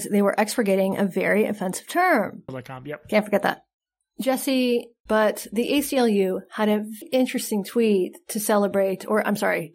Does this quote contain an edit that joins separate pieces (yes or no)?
yes